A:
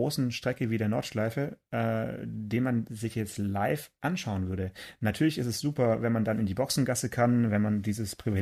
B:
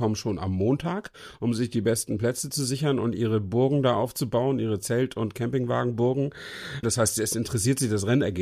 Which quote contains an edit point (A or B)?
B